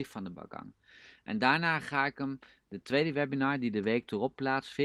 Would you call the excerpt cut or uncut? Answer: uncut